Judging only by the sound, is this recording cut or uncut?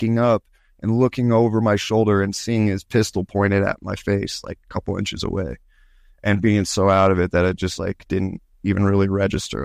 uncut